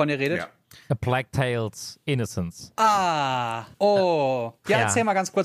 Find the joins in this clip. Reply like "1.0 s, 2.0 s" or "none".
3.7 s